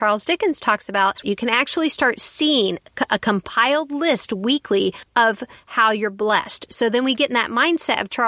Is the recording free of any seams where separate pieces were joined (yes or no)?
no